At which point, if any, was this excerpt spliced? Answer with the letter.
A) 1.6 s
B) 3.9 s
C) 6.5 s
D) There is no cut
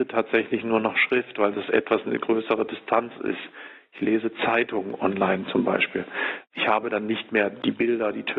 D